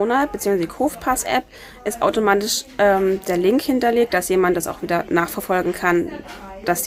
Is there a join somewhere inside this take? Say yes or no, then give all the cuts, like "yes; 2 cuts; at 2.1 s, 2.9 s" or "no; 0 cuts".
yes; 1 cut; at 4.1 s